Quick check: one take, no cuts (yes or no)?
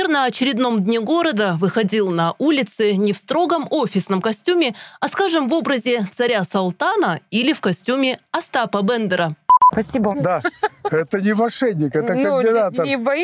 no